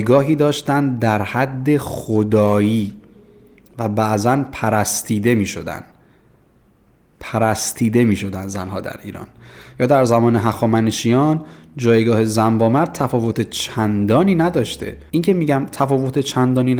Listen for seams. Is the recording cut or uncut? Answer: cut